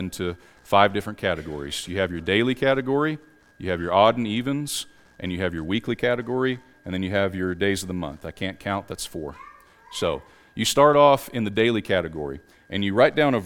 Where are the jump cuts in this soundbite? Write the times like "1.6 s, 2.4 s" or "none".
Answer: none